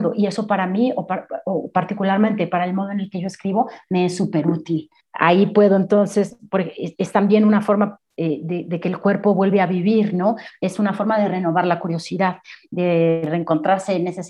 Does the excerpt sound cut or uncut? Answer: uncut